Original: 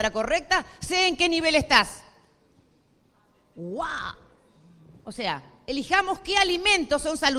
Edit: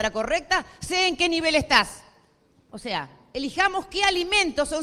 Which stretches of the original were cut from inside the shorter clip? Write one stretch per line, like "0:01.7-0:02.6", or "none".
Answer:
0:02.7-0:05.0